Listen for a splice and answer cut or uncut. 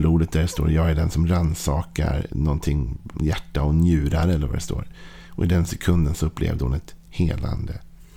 cut